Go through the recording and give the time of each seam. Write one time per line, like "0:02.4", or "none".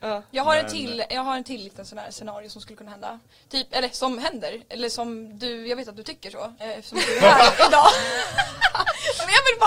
0:06.6